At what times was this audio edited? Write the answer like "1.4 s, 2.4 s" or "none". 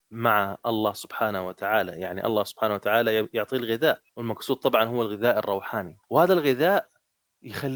4.1 s, 6.0 s